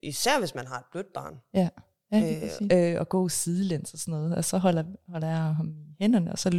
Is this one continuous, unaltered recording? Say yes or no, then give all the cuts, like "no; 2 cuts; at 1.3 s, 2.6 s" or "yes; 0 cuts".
no; 1 cut; at 2.7 s